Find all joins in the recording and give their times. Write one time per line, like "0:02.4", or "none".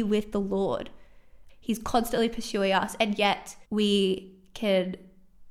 0:01.5
0:03.6

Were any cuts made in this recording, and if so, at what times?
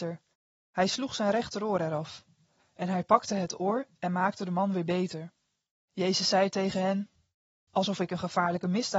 0:02.6
0:05.8
0:07.7

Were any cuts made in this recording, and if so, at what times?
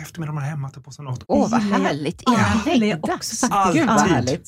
0:01.2

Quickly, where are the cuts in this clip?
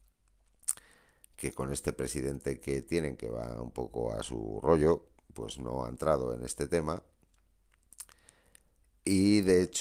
none

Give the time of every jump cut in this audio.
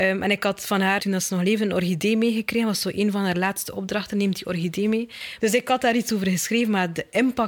0:01.0
0:05.4

